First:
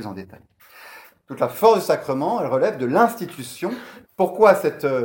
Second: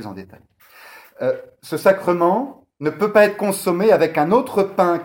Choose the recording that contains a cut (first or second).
first